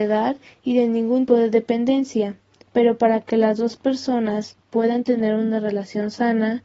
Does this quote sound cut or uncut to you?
cut